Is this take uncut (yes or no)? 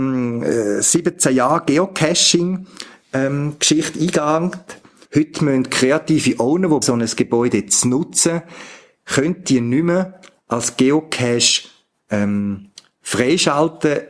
no